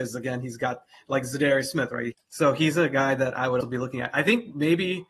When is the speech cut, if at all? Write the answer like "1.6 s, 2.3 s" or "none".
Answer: 2.1 s, 3.6 s